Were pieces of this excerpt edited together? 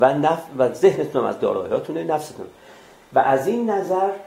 no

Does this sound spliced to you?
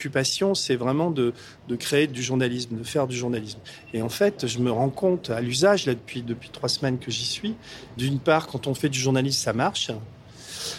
yes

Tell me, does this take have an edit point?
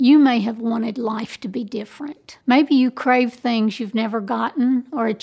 yes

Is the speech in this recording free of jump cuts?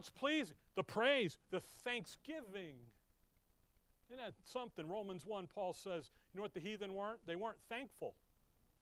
no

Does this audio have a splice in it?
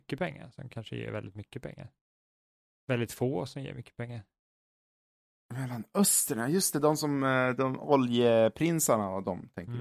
yes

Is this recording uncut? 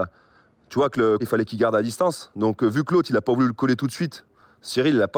no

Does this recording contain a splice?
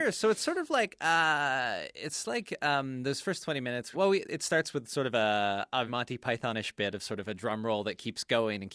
yes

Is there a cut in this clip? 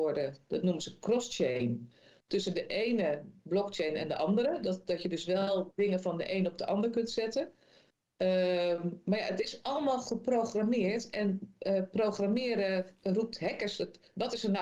no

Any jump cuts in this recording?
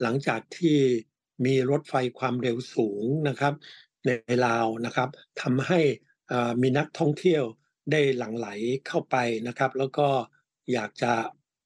no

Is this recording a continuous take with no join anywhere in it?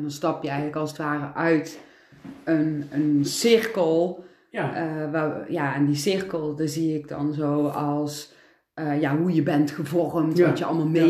yes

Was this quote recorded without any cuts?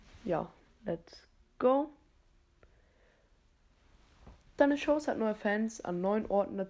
yes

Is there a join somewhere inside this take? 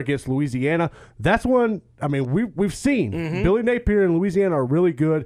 no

